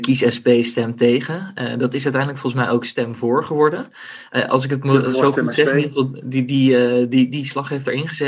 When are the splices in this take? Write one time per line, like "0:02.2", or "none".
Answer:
none